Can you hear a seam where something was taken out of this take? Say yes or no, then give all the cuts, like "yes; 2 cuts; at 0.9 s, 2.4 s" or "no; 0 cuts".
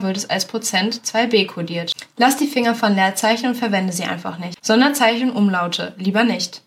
yes; 2 cuts; at 2.2 s, 4.6 s